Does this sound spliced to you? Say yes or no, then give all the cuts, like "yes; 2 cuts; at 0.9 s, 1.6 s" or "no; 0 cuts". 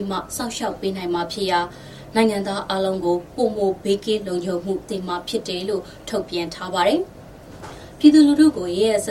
yes; 1 cut; at 4.9 s